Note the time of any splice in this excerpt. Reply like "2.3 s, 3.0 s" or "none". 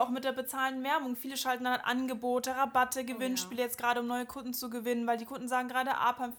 none

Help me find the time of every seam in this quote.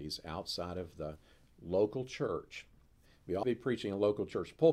3.4 s

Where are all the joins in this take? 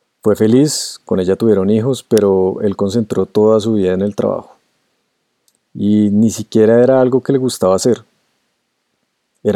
none

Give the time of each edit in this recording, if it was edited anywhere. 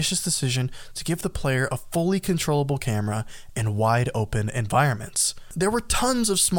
none

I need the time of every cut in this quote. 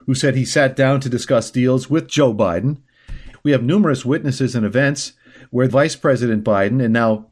3.3 s, 5.7 s

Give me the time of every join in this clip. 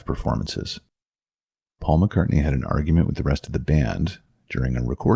1.7 s

